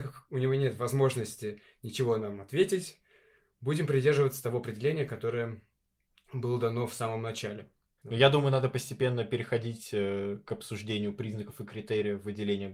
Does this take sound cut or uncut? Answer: cut